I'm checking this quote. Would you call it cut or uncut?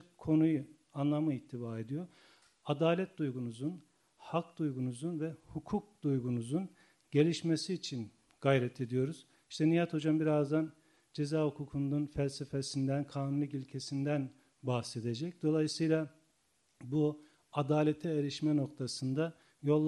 uncut